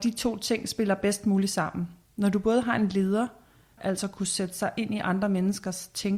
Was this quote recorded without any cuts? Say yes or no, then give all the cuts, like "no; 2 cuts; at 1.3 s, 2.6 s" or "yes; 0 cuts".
no; 1 cut; at 3.8 s